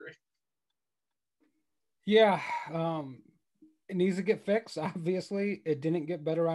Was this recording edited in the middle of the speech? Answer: no; 0 cuts

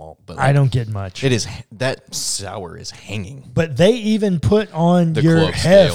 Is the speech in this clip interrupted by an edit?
no; 0 cuts

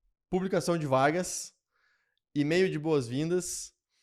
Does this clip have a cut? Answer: no; 0 cuts

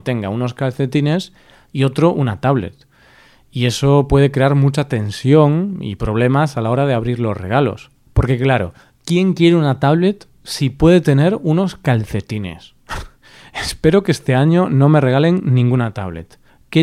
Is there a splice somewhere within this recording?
no; 0 cuts

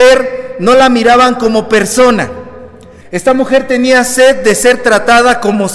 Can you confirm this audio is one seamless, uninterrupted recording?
no; 1 cut; at 3.0 s

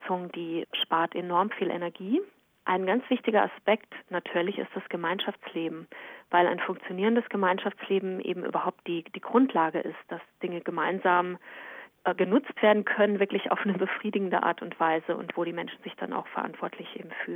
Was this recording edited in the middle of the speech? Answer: no; 0 cuts

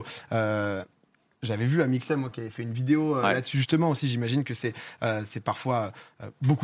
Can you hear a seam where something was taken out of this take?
no; 0 cuts

